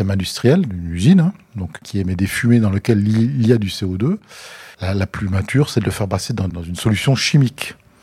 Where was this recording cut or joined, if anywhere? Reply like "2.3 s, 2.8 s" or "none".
4.7 s, 6.5 s